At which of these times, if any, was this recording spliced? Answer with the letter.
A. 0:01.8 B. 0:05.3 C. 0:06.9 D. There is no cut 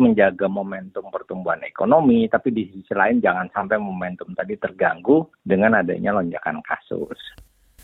B